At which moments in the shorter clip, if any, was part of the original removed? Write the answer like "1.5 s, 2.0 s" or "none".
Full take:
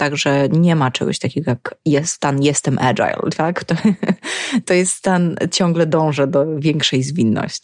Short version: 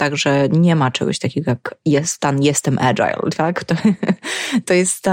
none